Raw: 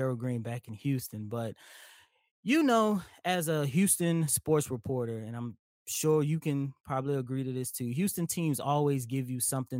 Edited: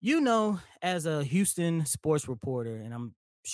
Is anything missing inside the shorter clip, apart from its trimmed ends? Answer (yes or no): no